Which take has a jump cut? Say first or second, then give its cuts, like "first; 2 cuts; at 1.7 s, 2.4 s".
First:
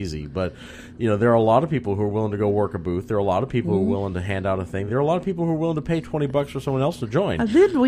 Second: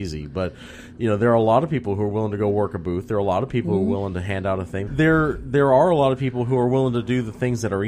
second; 1 cut; at 4.9 s